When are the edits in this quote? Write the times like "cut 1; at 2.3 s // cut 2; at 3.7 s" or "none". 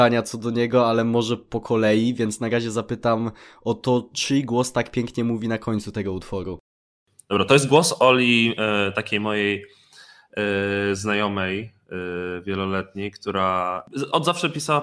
none